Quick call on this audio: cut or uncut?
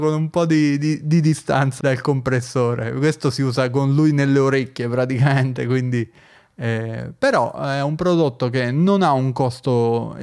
cut